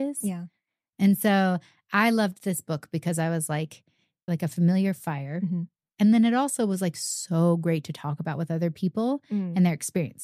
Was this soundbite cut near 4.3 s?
yes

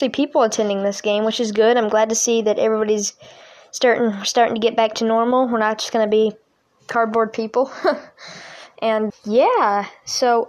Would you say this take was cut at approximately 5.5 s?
no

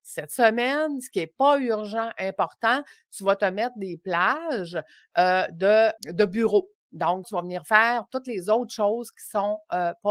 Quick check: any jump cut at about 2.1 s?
no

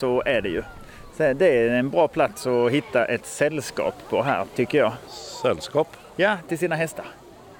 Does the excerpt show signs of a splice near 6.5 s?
yes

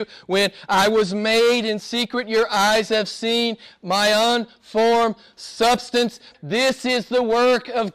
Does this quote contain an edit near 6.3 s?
yes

